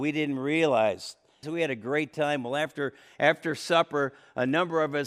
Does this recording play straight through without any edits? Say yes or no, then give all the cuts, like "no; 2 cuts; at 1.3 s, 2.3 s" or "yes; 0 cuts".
no; 1 cut; at 1.4 s